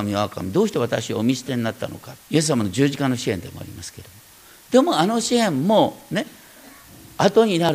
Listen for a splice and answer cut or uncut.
cut